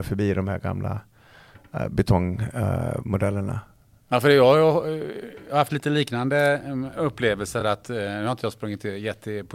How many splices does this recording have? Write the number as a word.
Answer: zero